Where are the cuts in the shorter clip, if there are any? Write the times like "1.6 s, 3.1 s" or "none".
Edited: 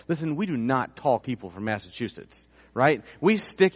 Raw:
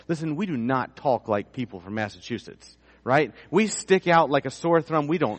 1.2 s